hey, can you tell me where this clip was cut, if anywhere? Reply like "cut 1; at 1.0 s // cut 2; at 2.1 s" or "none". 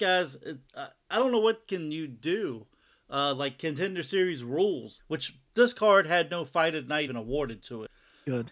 cut 1; at 5.0 s // cut 2; at 7.1 s